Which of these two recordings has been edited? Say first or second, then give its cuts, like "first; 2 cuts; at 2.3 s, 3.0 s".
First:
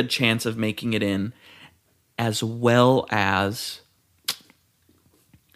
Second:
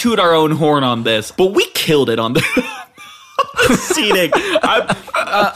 second; 1 cut; at 1.3 s